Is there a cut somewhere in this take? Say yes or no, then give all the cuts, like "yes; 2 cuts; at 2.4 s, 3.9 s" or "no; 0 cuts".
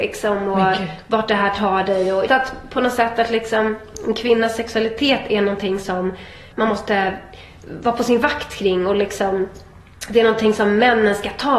yes; 2 cuts; at 2.3 s, 6.5 s